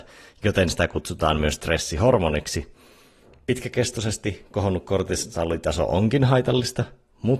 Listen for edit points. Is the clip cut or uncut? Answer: uncut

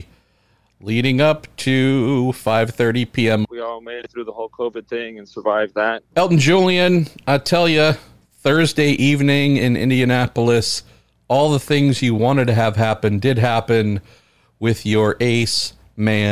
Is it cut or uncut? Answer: cut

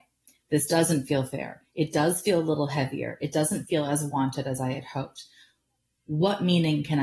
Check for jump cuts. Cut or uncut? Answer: uncut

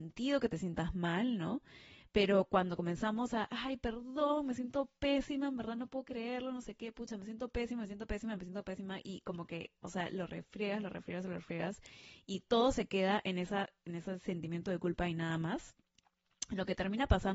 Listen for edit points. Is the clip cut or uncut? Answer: uncut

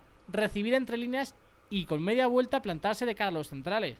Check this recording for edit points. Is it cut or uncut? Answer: uncut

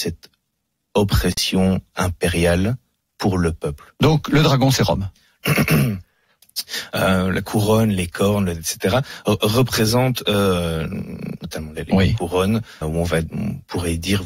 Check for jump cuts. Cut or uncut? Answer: cut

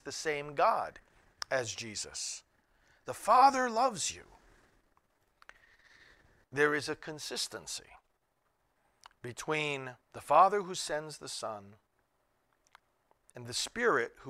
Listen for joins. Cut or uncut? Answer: cut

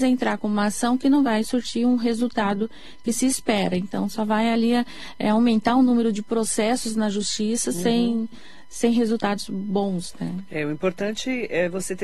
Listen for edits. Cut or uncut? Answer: uncut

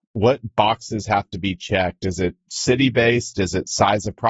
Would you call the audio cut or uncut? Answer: uncut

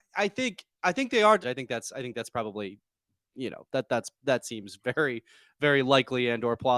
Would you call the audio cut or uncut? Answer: cut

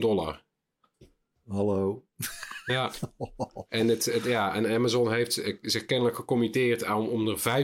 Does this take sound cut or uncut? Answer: uncut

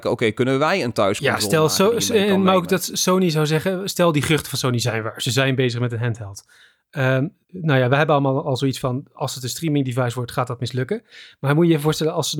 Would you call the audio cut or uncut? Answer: cut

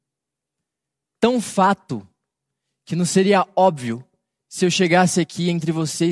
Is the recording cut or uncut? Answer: uncut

